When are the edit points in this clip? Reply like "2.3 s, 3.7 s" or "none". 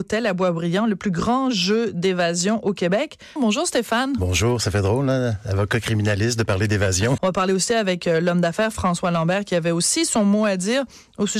3.4 s, 7.2 s